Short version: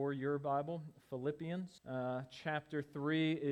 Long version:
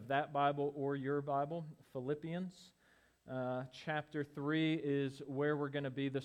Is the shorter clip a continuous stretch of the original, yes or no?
no